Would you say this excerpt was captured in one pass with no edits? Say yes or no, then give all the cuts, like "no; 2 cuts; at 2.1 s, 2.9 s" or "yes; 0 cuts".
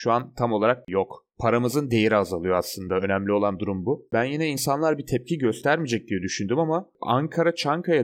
yes; 0 cuts